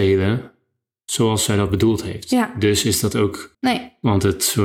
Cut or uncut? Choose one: cut